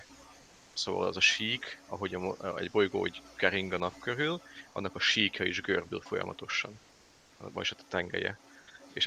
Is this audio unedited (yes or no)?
yes